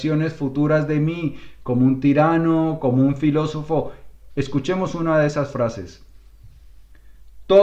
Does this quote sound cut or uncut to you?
cut